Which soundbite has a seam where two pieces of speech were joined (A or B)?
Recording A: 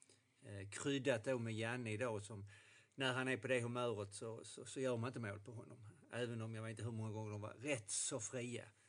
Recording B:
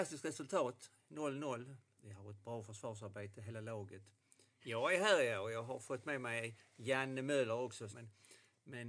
B